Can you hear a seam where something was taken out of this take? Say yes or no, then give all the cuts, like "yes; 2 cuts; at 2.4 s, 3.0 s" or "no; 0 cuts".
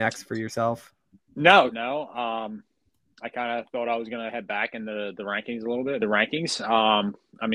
yes; 2 cuts; at 1.7 s, 6.0 s